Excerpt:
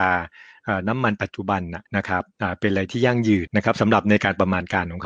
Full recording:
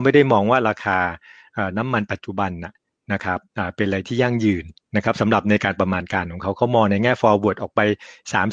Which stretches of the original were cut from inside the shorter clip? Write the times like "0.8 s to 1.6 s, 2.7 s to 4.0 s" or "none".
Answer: 2.8 s to 3.0 s, 4.6 s to 4.9 s